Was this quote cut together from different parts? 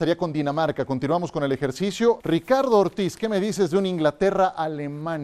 yes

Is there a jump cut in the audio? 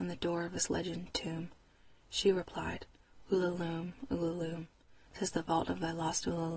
no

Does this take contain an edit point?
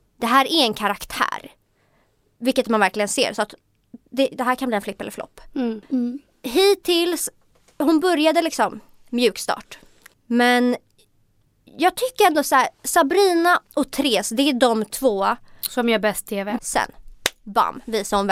yes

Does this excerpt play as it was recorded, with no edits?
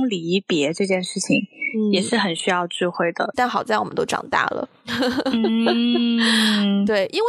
no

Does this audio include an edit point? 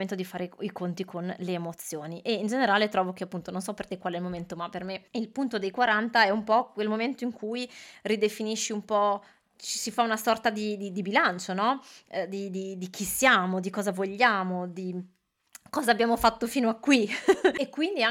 no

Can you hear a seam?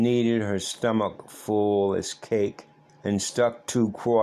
yes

